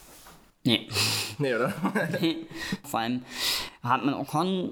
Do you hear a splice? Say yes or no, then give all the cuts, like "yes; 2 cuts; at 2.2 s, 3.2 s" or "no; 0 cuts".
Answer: yes; 1 cut; at 2.8 s